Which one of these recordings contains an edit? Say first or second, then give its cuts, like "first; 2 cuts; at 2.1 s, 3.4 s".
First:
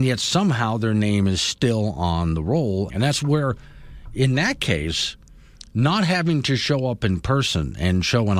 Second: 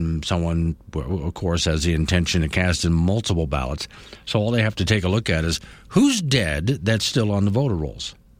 first; 1 cut; at 2.9 s